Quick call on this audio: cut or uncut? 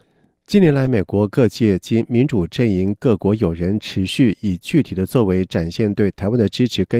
uncut